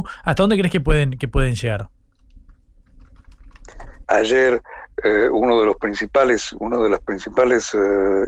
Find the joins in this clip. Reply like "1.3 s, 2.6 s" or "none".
4.0 s